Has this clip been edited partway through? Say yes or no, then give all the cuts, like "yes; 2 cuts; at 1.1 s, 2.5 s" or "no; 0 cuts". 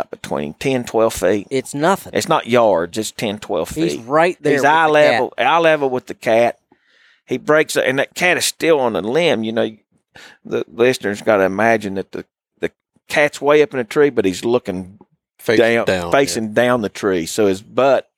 no; 0 cuts